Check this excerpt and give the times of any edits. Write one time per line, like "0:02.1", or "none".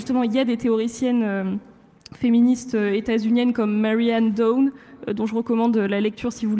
none